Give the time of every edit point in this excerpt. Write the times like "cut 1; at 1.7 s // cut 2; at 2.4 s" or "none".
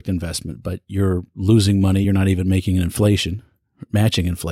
none